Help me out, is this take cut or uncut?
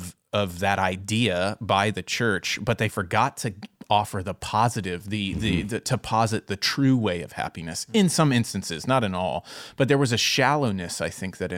uncut